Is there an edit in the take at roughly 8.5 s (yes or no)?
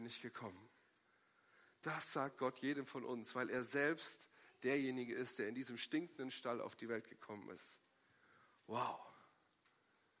no